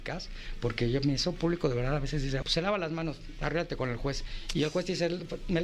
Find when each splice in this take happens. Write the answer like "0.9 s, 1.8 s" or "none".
2.4 s